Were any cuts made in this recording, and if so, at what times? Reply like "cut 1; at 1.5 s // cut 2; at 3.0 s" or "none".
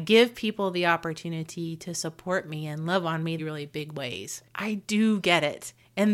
cut 1; at 3.4 s // cut 2; at 4.5 s

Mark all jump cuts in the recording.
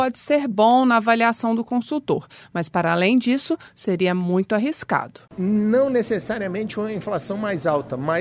none

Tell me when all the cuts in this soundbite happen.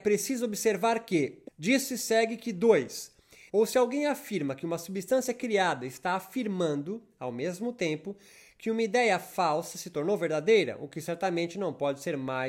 cut 1; at 1.5 s // cut 2; at 3.5 s

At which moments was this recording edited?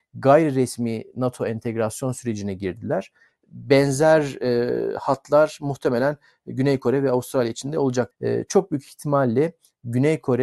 cut 1; at 3.3 s // cut 2; at 8.1 s

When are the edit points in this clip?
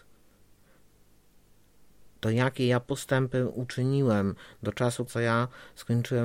cut 1; at 2.2 s // cut 2; at 5.1 s

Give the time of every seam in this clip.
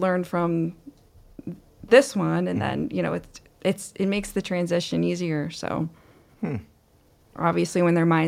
cut 1; at 7.3 s

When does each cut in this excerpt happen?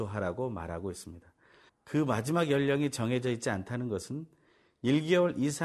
cut 1; at 1.7 s

